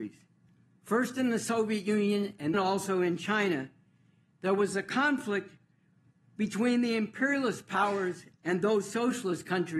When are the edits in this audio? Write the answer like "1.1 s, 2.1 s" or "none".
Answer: 2.5 s